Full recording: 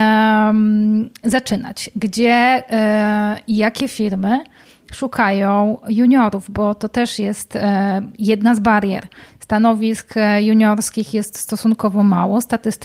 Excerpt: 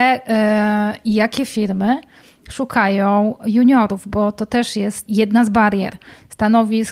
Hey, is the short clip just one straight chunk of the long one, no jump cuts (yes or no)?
no